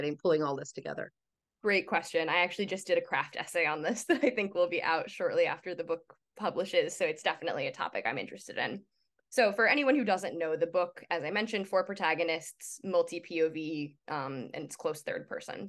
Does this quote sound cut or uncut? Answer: uncut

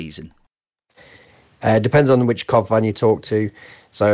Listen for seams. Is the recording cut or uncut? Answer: uncut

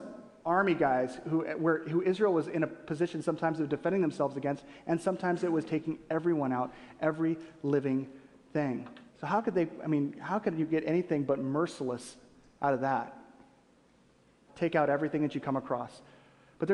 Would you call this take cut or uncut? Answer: cut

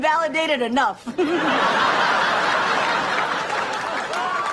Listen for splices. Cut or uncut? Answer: uncut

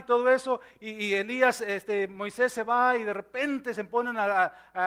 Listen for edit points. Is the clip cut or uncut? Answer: uncut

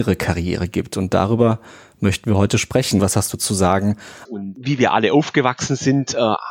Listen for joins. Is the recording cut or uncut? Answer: cut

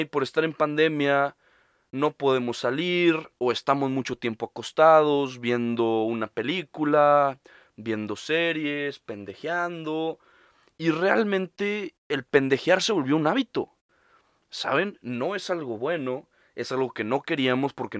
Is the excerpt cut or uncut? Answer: uncut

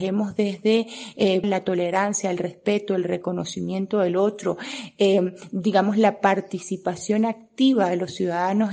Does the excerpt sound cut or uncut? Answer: cut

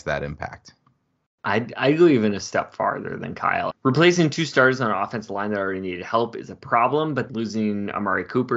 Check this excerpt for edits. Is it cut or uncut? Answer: cut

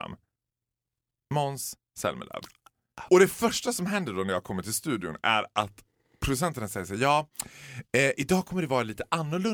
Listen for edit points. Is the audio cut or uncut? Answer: cut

